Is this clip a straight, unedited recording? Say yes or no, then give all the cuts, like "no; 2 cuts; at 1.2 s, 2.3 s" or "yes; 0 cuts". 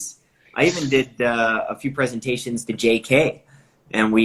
yes; 0 cuts